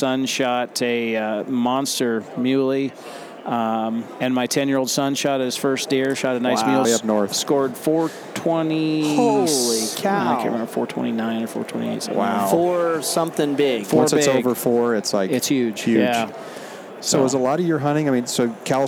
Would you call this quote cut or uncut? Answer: cut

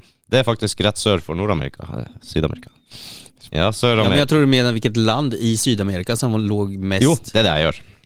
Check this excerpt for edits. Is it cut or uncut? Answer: cut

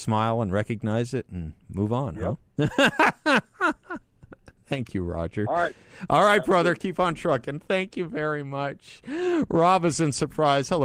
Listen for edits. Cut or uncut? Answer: uncut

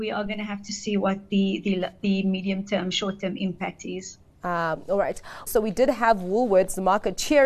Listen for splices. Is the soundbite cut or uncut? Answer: cut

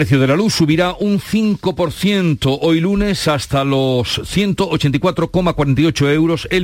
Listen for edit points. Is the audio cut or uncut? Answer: uncut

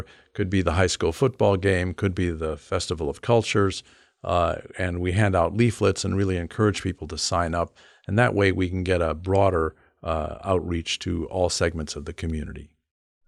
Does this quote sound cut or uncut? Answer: uncut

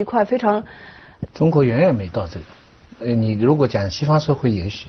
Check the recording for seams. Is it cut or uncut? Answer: cut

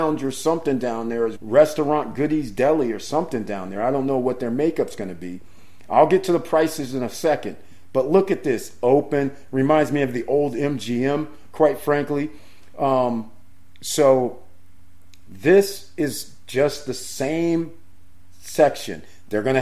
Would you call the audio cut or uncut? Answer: cut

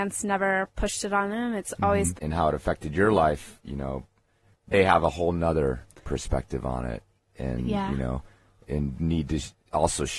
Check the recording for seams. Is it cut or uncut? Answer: cut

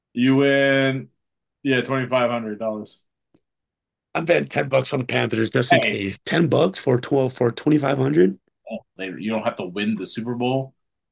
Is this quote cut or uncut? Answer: cut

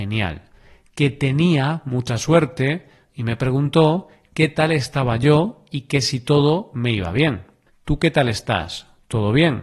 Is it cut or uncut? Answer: cut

